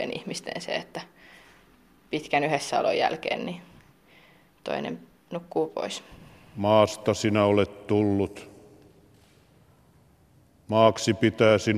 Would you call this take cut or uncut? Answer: uncut